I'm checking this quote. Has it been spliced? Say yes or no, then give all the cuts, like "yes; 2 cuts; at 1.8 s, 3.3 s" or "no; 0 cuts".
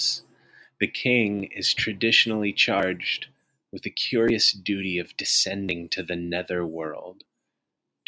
no; 0 cuts